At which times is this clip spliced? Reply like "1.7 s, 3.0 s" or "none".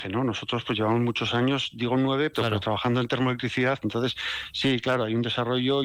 2.3 s, 3.8 s